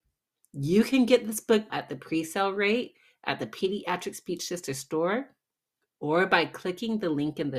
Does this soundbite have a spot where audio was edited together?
yes; 1 cut; at 1.7 s

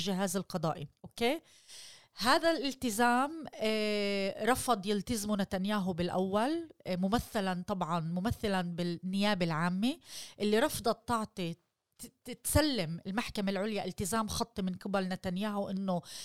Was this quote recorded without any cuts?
no; 1 cut; at 1.0 s

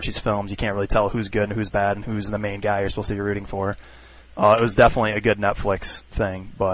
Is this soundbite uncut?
no; 1 cut; at 4.2 s

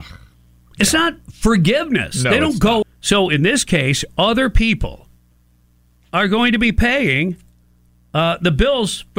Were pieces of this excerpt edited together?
yes; 1 cut; at 2.8 s

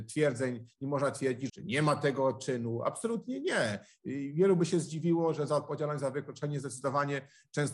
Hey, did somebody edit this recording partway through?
yes; 1 cut; at 1.5 s

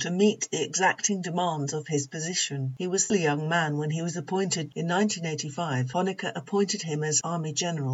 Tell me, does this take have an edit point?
yes; 2 cuts; at 3.1 s, 4.7 s

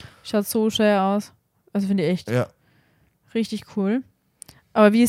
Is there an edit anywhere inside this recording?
no; 0 cuts

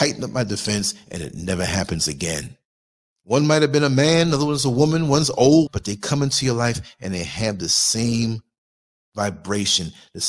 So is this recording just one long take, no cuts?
no; 2 cuts; at 3.1 s, 5.7 s

